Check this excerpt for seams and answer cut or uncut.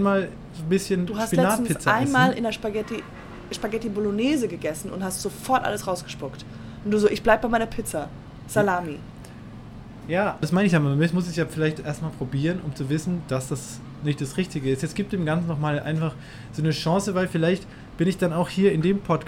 cut